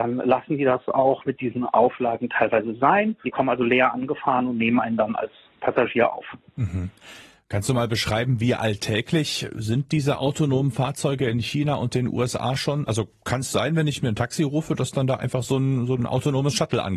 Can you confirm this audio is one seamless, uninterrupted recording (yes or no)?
no